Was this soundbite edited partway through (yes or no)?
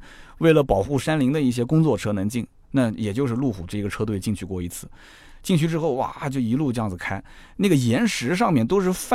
no